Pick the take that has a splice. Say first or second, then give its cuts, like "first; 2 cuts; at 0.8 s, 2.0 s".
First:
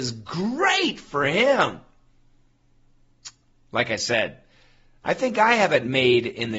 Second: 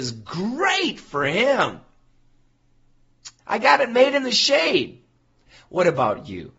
second; 1 cut; at 3.4 s